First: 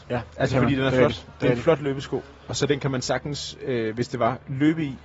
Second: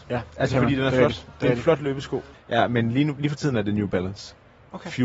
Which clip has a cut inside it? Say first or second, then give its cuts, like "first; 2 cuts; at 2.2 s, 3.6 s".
second; 1 cut; at 2.3 s